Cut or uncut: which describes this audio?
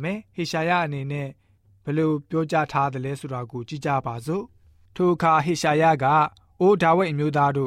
uncut